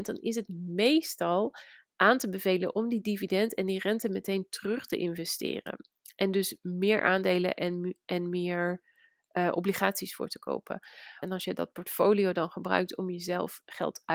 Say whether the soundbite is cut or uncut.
cut